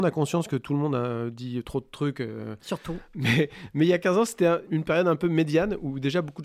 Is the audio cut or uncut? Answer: cut